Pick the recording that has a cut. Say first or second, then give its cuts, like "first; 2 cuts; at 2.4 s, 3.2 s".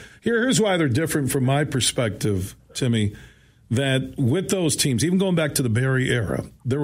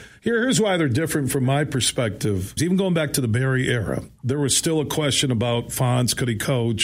second; 1 cut; at 2.6 s